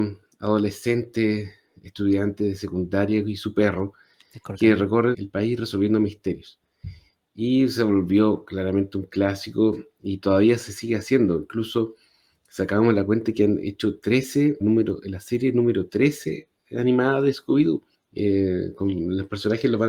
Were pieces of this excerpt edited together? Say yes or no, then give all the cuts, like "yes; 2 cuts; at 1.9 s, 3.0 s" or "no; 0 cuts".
yes; 3 cuts; at 5.1 s, 14.6 s, 17.9 s